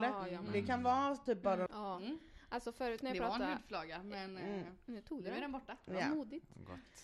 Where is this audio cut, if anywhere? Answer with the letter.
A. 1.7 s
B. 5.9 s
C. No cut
A